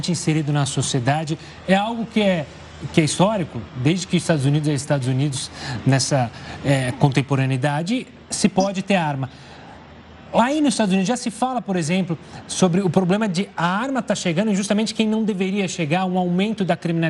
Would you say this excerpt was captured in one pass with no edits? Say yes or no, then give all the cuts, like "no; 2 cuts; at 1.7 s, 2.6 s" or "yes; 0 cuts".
yes; 0 cuts